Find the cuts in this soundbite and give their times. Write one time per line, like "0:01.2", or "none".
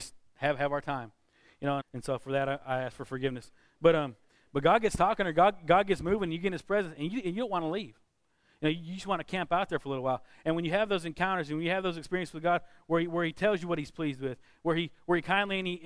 0:01.8